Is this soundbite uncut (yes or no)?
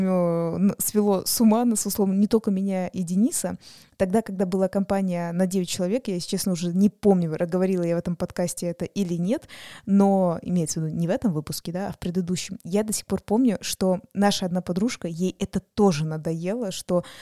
yes